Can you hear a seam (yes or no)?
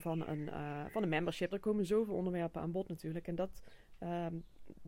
yes